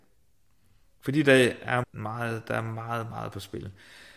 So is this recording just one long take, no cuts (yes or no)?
no